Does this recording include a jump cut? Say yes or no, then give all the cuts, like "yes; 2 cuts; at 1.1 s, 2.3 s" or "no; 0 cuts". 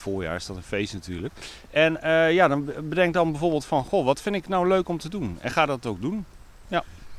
no; 0 cuts